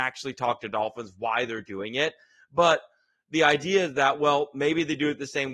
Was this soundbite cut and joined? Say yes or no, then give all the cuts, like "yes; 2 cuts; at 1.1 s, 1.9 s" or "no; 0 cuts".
no; 0 cuts